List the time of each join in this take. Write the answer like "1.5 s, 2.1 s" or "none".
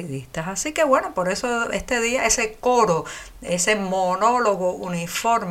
none